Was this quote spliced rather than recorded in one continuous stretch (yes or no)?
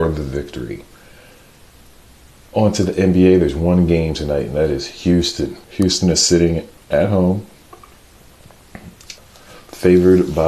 yes